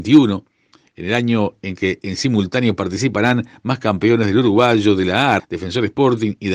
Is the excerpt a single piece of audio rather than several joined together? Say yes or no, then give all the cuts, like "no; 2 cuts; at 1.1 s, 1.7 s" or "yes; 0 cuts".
no; 1 cut; at 5.4 s